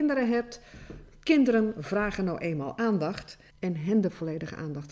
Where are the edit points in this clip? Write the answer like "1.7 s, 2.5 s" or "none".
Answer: 3.5 s